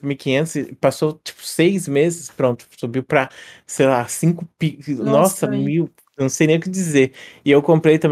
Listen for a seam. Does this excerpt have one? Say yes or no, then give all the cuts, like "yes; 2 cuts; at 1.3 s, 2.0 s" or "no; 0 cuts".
no; 0 cuts